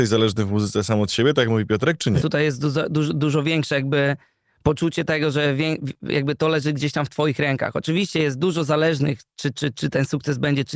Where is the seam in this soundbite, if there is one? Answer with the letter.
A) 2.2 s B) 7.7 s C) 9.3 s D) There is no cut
A